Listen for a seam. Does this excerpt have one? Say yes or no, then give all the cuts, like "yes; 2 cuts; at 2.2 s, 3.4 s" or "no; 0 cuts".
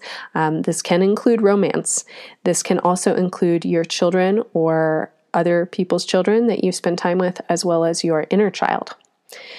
no; 0 cuts